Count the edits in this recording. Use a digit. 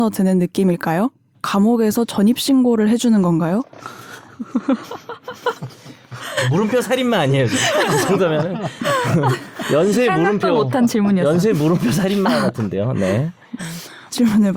1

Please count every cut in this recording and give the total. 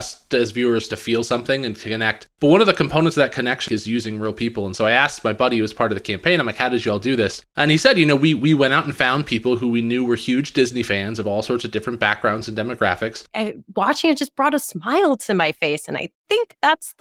2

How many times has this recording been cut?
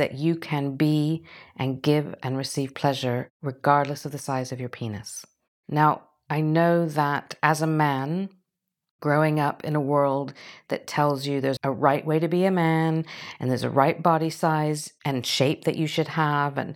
1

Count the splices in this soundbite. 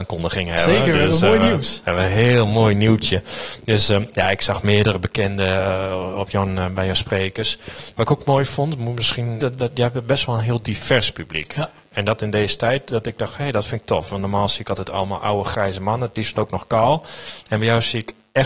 2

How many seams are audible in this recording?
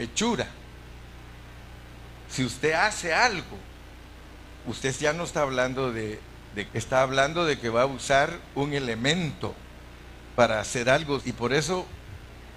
2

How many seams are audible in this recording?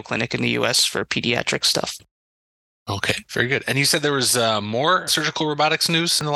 2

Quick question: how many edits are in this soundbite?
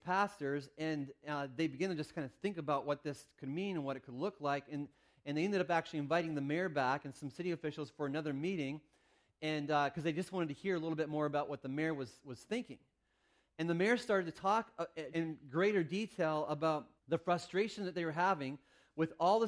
2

